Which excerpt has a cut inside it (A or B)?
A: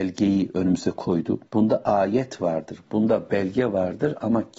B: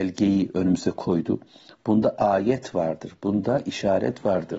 A